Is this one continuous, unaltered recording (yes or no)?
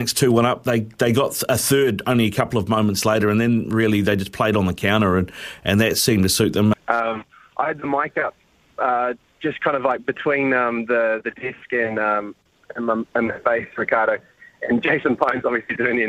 no